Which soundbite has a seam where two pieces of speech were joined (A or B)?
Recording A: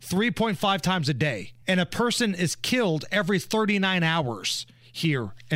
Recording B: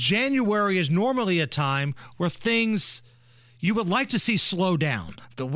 A